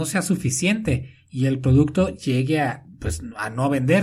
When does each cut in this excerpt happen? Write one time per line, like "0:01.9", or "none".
none